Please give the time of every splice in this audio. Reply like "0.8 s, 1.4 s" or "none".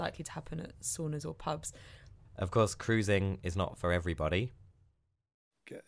2.3 s